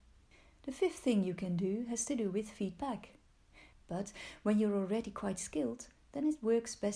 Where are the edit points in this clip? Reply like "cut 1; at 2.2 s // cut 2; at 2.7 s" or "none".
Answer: cut 1; at 3.7 s